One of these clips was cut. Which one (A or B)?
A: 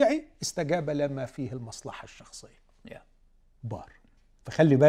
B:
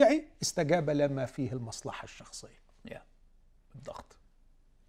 A